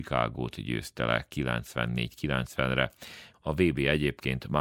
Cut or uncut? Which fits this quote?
cut